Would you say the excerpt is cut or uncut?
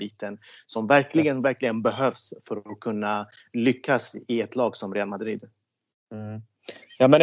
uncut